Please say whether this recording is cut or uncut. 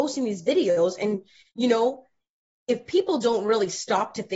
uncut